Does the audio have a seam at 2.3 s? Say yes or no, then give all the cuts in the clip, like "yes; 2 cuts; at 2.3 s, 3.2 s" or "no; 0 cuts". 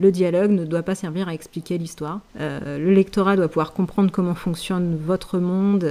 yes; 1 cut; at 2.3 s